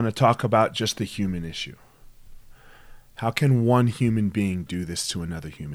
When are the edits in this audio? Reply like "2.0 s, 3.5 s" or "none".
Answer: none